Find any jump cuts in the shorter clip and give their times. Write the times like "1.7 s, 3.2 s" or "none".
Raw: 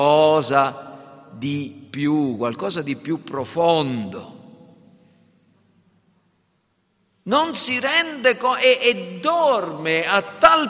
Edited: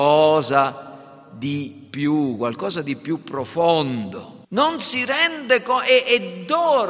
4.4 s